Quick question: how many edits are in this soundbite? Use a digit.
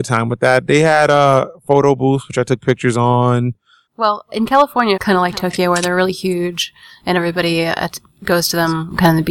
2